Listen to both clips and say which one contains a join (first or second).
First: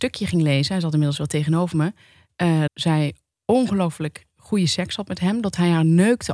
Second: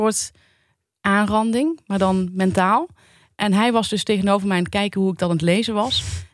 first